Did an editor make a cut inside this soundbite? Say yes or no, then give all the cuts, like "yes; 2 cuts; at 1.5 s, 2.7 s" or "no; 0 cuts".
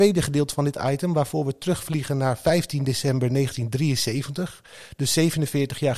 no; 0 cuts